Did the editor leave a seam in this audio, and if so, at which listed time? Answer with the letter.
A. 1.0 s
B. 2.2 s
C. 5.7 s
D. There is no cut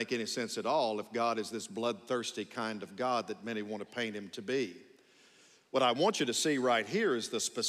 D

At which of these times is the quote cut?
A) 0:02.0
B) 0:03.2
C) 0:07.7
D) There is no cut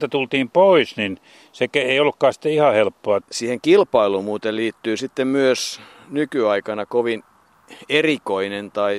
B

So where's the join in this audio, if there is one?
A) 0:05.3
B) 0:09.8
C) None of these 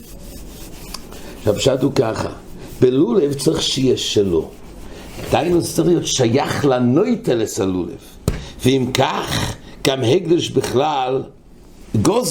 C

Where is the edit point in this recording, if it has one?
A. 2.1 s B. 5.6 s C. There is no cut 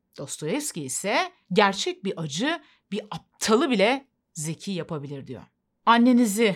C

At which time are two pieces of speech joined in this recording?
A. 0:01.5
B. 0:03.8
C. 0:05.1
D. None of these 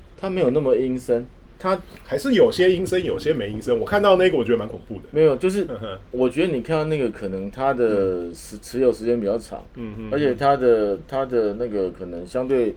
A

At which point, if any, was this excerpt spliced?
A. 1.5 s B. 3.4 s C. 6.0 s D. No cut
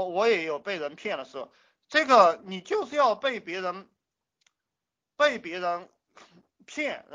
D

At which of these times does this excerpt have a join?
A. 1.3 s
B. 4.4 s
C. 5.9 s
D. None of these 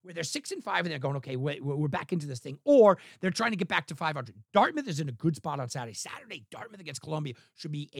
D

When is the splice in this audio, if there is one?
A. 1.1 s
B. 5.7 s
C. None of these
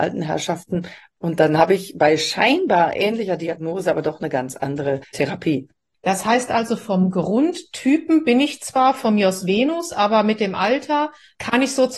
C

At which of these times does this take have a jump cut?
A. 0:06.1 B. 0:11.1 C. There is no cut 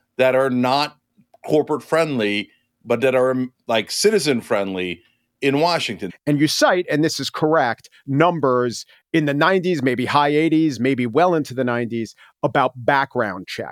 A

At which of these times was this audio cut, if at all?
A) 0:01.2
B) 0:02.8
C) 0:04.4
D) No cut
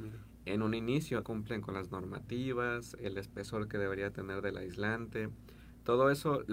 A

